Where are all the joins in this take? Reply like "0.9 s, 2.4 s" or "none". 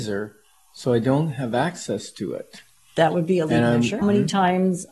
4.0 s